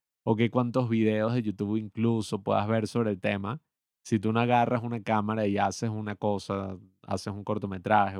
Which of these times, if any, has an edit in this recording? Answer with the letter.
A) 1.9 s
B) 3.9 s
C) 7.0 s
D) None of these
D